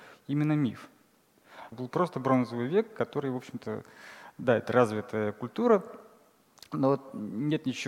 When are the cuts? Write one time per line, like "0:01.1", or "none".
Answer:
0:01.7